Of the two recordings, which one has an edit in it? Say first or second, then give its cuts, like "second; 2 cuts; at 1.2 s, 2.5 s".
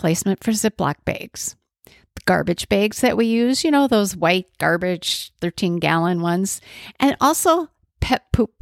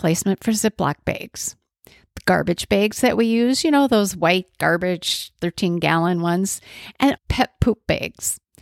second; 1 cut; at 7.2 s